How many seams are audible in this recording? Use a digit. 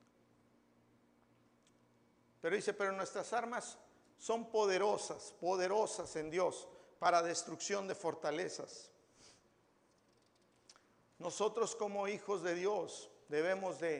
0